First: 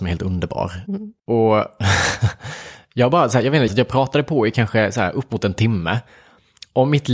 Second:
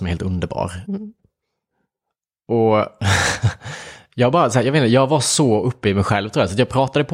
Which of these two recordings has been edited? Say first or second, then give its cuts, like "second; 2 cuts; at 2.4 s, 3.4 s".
first; 2 cuts; at 1.2 s, 3.7 s